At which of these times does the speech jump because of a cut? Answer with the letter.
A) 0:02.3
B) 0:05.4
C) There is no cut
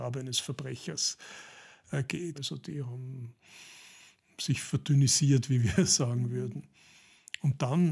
A